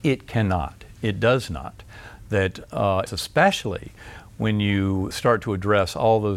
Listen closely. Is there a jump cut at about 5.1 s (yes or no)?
yes